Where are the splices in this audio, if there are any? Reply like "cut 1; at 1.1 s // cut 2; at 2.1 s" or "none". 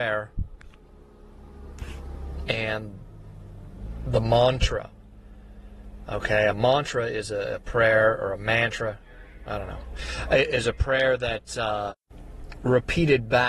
none